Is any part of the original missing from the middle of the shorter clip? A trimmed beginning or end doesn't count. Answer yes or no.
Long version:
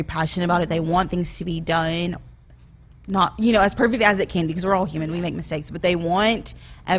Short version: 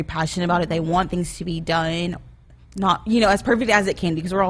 yes